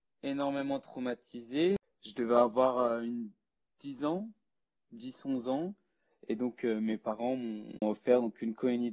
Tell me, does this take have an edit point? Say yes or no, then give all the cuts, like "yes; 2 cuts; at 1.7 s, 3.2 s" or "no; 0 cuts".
no; 0 cuts